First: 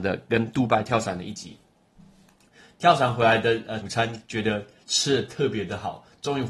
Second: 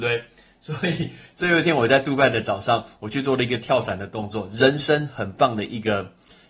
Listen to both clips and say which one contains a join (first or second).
first